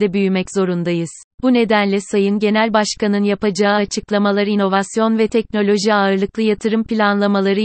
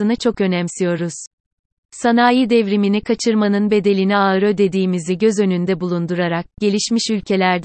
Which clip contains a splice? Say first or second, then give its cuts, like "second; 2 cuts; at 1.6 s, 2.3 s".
first; 1 cut; at 1.3 s